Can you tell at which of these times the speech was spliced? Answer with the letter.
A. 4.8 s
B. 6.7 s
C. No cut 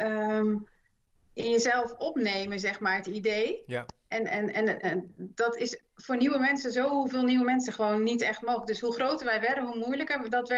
A